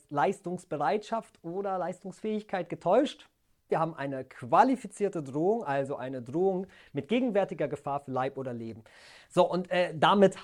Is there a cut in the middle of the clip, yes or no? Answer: yes